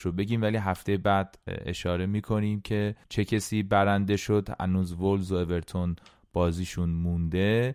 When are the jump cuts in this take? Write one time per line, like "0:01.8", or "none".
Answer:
0:03.0